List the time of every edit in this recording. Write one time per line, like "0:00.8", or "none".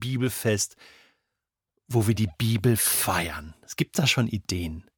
none